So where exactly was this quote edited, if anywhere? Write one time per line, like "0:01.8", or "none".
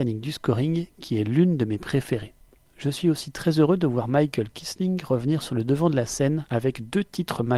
none

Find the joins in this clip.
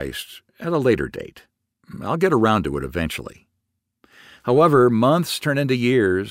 none

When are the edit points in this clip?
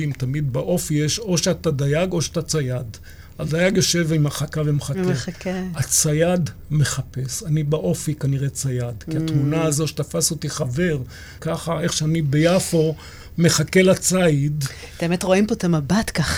0:11.4

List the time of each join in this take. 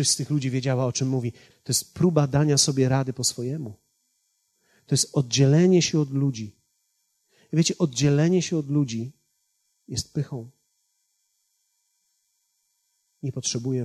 0:01.5

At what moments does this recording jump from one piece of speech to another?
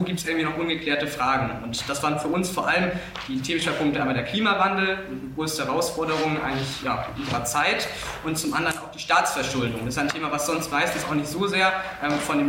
none

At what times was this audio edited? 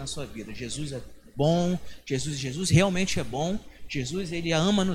none

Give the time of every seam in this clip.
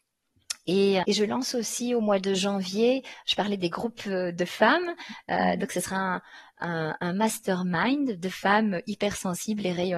0:01.0

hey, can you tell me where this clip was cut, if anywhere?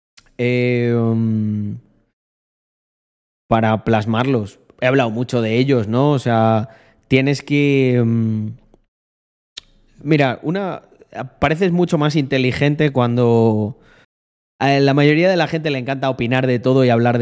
0:14.0

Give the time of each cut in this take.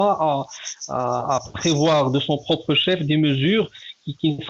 none

